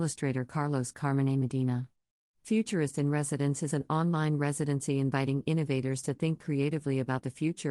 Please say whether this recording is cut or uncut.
uncut